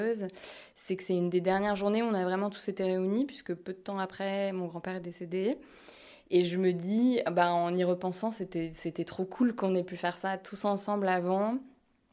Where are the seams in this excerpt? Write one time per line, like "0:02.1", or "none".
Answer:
none

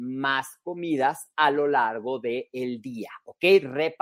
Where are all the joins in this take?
none

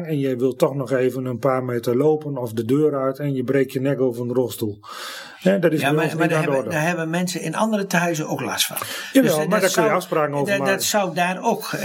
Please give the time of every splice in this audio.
none

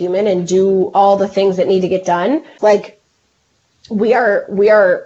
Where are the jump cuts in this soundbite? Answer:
0:02.6

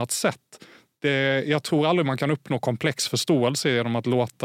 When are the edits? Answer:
none

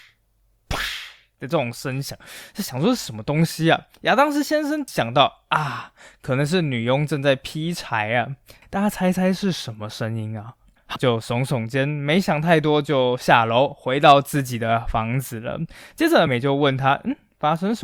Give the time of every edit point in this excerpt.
0:11.0
0:16.3

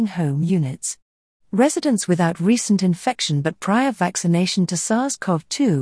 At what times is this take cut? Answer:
none

